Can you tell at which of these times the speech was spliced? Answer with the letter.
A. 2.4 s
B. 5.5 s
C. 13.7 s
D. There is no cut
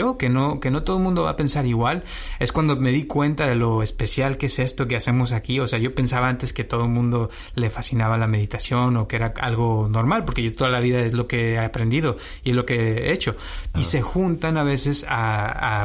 C